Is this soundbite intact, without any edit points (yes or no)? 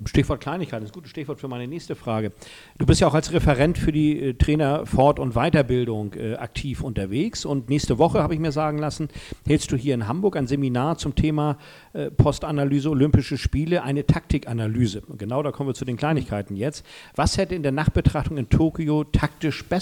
yes